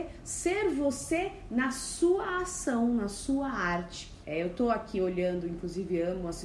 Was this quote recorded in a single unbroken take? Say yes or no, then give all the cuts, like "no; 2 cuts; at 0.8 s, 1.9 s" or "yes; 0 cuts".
no; 1 cut; at 4.2 s